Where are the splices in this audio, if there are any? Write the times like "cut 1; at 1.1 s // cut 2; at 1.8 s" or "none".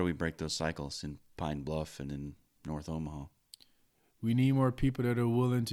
none

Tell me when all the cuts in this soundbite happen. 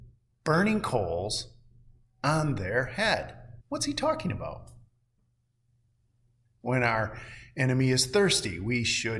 cut 1; at 3.6 s // cut 2; at 6.6 s

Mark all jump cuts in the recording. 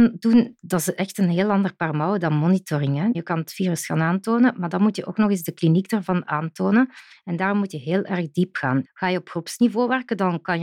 cut 1; at 3.1 s // cut 2; at 8.8 s

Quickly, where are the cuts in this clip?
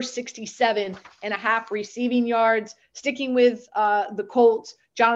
none

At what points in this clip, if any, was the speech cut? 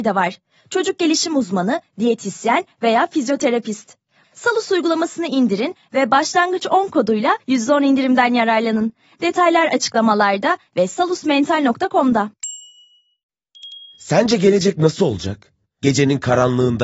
cut 1; at 4.2 s // cut 2; at 15.7 s

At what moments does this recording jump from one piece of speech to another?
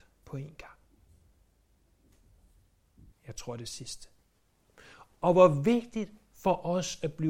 cut 1; at 3.1 s

